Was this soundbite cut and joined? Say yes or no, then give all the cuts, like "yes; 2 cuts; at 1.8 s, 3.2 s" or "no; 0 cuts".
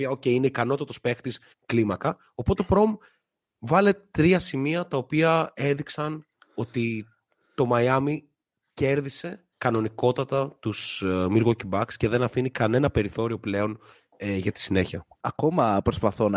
yes; 2 cuts; at 1.5 s, 9.5 s